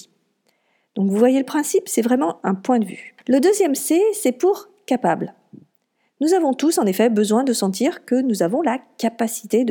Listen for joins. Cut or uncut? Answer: uncut